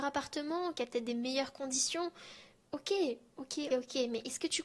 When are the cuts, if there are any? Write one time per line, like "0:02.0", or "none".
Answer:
0:03.7